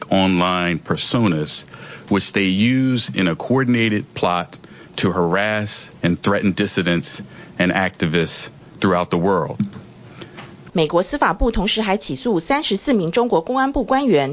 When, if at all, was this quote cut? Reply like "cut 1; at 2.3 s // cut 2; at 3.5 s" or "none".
cut 1; at 6.0 s // cut 2; at 10.7 s